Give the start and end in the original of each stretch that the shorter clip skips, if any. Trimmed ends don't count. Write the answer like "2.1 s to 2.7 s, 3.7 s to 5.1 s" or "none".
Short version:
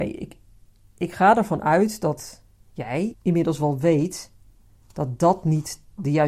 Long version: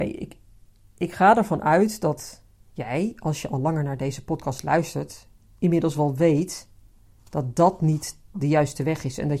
3.1 s to 5.5 s